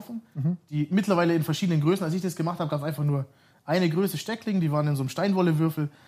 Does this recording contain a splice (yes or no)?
no